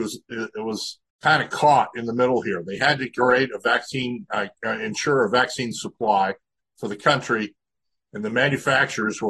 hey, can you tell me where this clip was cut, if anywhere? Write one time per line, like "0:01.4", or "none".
0:01.1